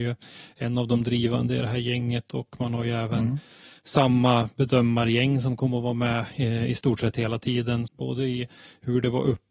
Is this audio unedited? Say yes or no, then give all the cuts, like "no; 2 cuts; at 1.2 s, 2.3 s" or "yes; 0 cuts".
no; 1 cut; at 7.9 s